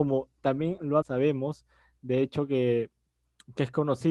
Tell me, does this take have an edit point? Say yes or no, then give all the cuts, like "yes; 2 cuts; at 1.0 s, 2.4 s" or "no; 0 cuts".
yes; 1 cut; at 1.0 s